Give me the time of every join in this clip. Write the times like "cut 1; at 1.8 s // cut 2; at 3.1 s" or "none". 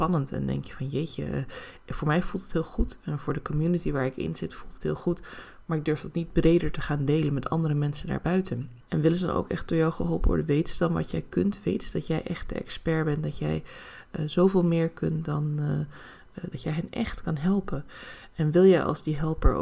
cut 1; at 8.8 s // cut 2; at 16.5 s